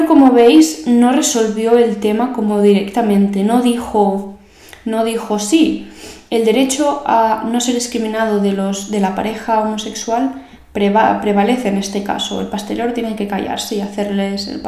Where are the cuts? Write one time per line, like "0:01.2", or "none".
none